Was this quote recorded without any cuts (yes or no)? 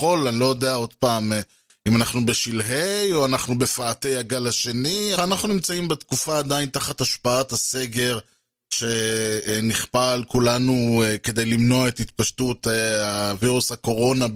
no